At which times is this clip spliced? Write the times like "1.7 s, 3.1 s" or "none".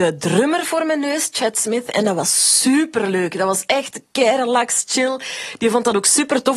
none